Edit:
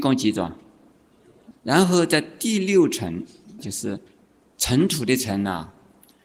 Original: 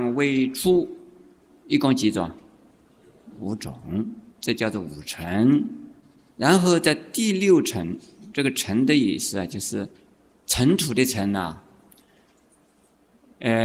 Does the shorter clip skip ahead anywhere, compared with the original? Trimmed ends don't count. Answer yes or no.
yes